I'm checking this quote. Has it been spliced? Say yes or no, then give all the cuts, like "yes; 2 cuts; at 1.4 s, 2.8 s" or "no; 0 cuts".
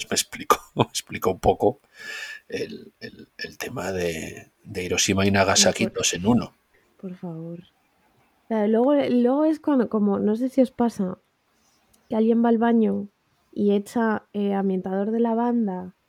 no; 0 cuts